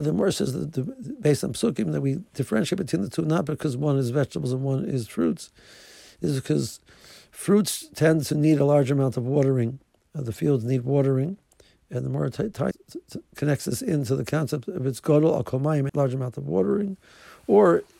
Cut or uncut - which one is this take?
cut